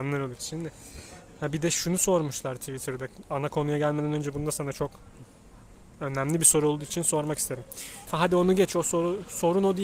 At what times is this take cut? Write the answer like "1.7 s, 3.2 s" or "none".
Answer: 8.1 s